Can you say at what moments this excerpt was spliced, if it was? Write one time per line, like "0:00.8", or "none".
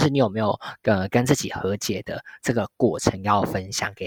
none